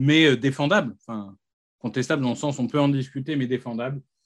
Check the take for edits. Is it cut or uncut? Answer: uncut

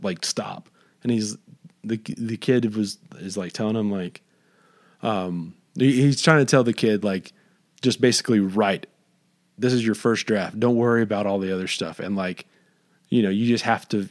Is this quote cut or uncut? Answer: uncut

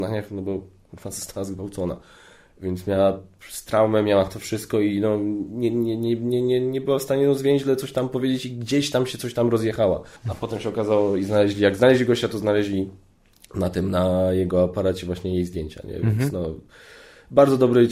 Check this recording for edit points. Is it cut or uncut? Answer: cut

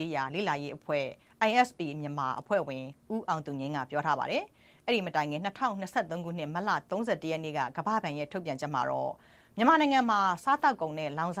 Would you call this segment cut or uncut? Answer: uncut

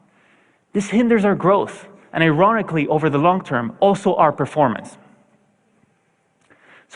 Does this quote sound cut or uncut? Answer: uncut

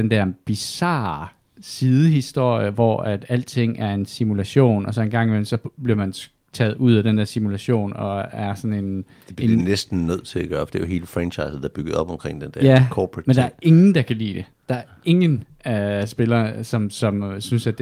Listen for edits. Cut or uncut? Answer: uncut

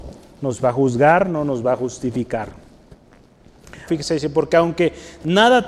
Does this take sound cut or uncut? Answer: cut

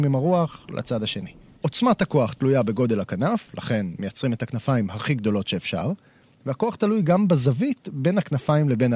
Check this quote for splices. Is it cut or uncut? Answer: cut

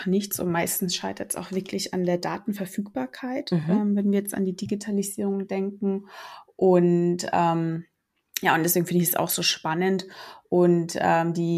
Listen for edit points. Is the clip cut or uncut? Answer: uncut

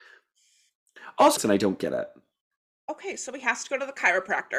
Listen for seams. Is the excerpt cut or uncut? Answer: cut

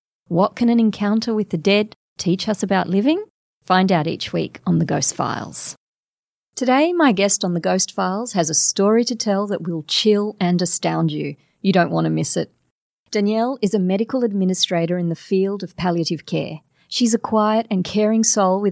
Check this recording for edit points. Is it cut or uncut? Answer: uncut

